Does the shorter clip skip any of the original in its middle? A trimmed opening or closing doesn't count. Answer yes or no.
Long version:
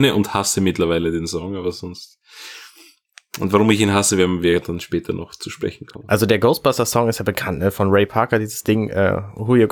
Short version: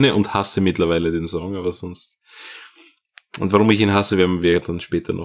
no